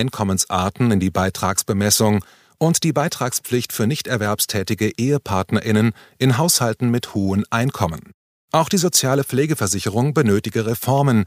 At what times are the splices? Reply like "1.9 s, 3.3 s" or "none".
8.3 s